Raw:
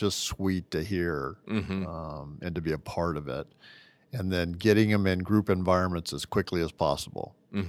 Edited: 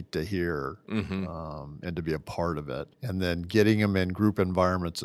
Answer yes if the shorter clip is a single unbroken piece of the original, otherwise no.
no